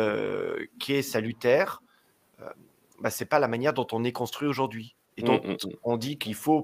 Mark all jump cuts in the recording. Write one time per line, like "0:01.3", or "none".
none